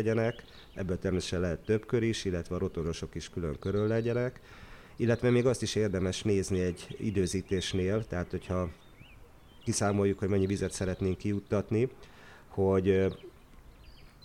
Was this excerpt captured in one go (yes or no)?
yes